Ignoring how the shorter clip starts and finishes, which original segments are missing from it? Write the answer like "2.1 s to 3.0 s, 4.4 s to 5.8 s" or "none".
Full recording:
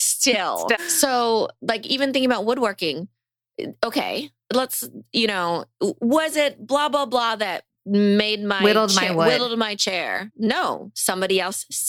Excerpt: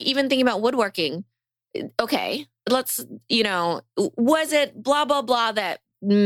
none